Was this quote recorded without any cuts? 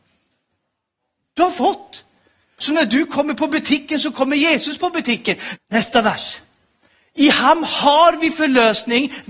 no; 2 cuts; at 2.6 s, 5.6 s

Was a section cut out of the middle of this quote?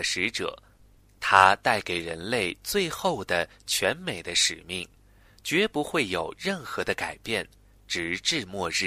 no; 0 cuts

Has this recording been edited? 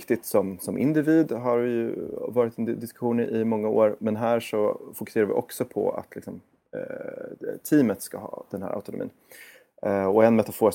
yes; 1 cut; at 4.0 s

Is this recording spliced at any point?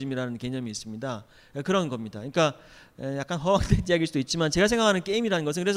no; 0 cuts

